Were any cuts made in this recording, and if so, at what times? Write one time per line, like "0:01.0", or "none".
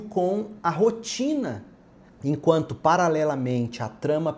0:02.1